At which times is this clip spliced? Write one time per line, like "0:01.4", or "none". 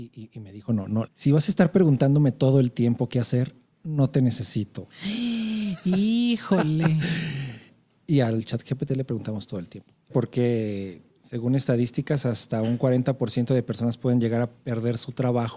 0:01.1
0:10.1